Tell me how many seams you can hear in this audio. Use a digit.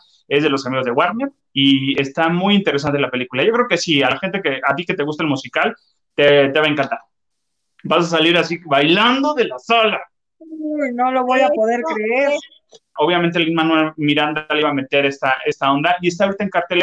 1